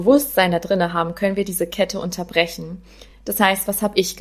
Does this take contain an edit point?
no; 0 cuts

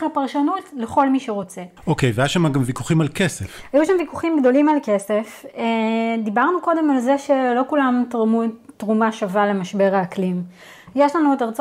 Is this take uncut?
yes; 0 cuts

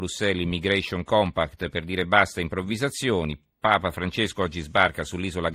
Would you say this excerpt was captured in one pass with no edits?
yes; 0 cuts

